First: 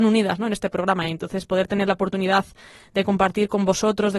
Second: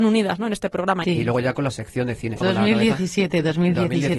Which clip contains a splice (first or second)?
second